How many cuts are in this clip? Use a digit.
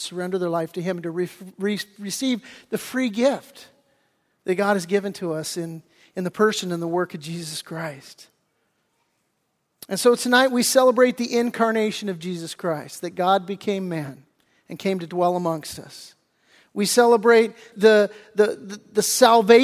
1